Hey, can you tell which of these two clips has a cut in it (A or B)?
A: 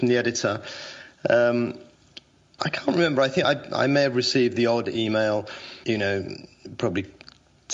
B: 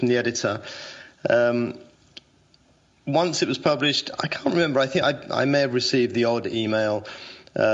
A